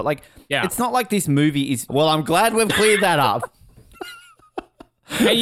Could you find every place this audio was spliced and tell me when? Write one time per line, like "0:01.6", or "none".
0:01.9